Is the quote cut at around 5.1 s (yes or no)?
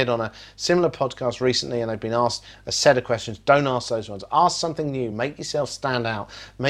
no